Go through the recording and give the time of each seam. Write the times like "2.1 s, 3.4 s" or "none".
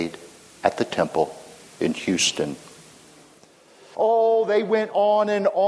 3.9 s